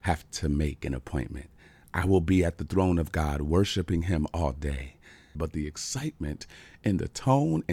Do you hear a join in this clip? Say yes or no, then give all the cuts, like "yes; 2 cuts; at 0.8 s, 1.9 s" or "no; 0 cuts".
yes; 1 cut; at 5.3 s